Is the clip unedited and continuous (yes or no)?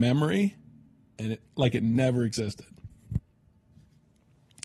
yes